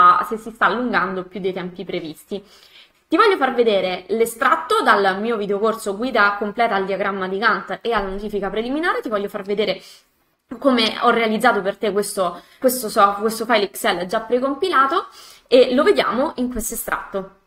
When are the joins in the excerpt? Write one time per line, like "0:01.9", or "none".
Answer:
0:02.9
0:12.6

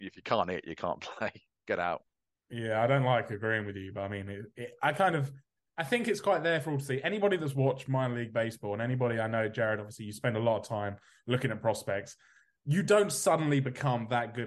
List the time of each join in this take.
none

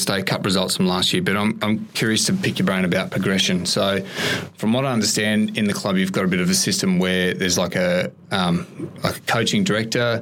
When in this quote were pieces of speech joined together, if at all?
none

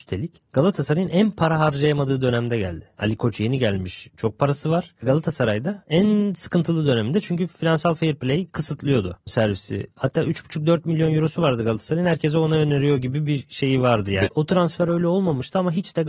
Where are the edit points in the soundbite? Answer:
0:09.3
0:14.3

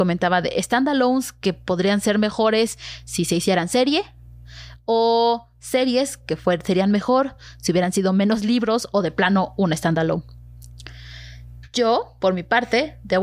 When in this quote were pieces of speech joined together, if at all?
none

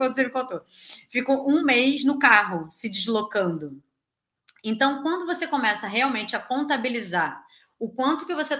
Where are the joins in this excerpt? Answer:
none

